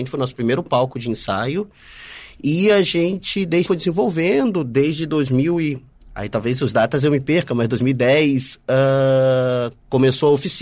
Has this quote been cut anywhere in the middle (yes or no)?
yes